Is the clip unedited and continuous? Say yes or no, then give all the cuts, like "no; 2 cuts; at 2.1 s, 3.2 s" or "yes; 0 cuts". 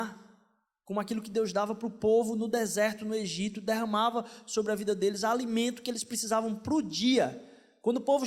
yes; 0 cuts